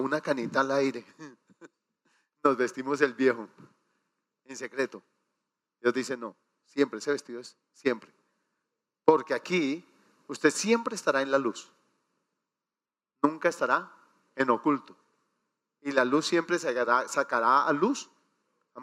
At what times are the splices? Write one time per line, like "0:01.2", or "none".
none